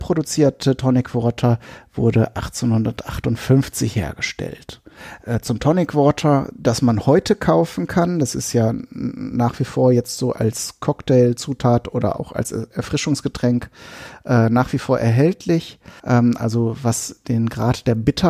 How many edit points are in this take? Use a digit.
1